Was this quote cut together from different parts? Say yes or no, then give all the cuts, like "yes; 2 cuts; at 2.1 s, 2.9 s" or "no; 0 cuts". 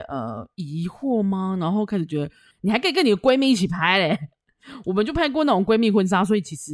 yes; 1 cut; at 2.5 s